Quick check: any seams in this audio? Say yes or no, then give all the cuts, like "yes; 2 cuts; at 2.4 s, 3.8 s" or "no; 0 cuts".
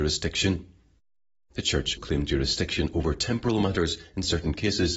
yes; 1 cut; at 2.0 s